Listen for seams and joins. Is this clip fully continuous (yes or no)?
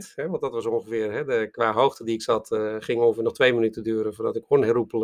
yes